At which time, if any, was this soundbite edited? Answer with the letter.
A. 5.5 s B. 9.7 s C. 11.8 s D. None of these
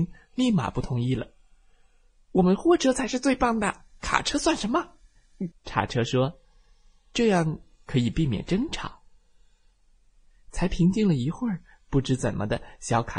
A